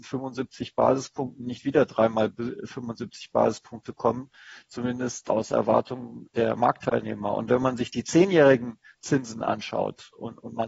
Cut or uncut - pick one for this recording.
uncut